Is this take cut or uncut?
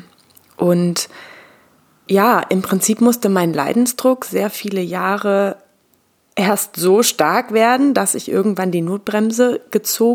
cut